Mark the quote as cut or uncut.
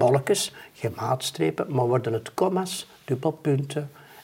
uncut